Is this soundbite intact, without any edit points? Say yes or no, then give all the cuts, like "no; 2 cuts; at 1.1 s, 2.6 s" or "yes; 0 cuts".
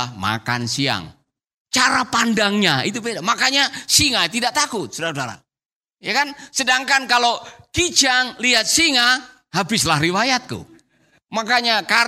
yes; 0 cuts